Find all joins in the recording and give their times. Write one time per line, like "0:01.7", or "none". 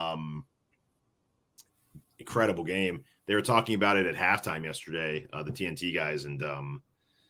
0:02.0